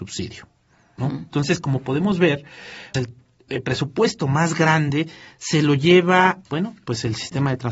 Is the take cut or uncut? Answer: cut